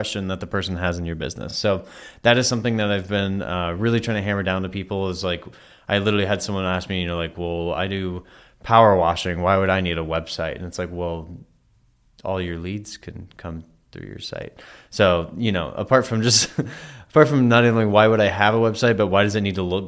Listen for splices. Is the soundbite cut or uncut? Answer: uncut